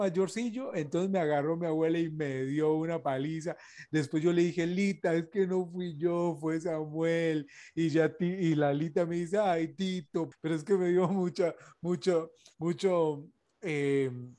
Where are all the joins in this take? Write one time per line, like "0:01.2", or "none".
0:10.3